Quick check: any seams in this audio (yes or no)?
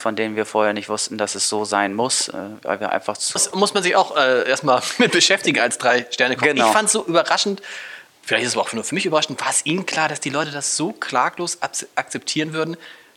yes